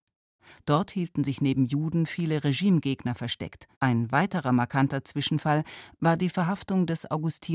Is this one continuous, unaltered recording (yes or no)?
no